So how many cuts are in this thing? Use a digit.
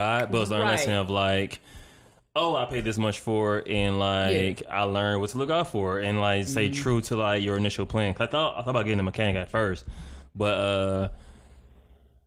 0